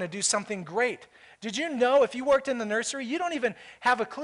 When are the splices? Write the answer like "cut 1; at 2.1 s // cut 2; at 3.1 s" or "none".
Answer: none